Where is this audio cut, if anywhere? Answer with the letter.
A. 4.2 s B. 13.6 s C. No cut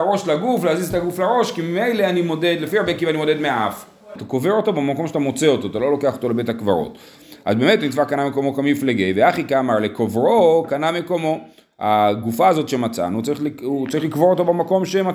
A